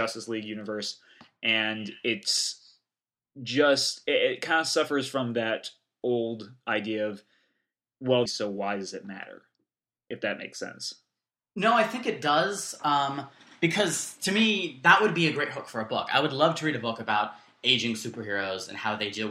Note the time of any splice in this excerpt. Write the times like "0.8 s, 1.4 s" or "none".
8.3 s